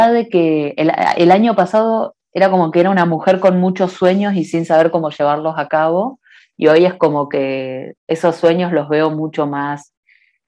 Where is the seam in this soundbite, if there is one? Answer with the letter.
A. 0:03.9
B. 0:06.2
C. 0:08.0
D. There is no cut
C